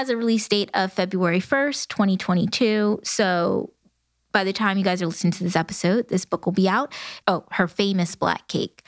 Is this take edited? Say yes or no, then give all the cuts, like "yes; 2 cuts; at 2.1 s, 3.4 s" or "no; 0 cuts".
yes; 1 cut; at 7.2 s